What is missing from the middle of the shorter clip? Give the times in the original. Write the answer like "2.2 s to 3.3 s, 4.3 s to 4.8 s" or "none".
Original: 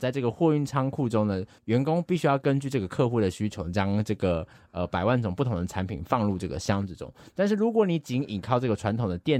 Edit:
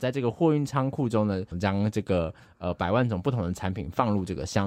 1.5 s to 3.6 s